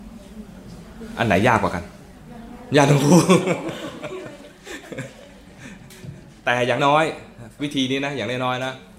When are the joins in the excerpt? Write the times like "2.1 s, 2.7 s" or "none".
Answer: 6.8 s